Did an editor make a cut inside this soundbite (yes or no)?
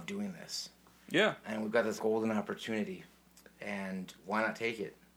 yes